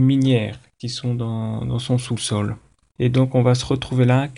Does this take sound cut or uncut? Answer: cut